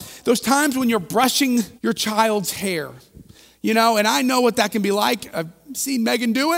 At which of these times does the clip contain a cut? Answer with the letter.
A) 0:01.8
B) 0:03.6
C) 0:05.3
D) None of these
A